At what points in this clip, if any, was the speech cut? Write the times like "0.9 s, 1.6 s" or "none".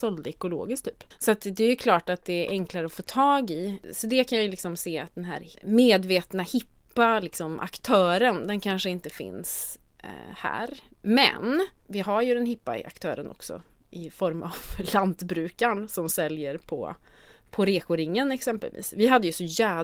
none